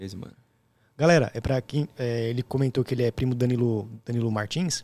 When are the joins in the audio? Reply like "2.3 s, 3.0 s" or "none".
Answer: none